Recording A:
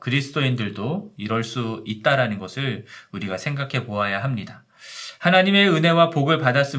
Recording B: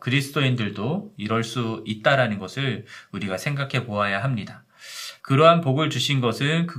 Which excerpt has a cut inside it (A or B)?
B